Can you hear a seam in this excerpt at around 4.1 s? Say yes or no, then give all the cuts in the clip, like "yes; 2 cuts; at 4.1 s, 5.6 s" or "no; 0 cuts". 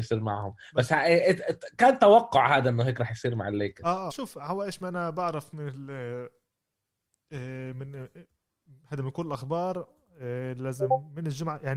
yes; 1 cut; at 4.1 s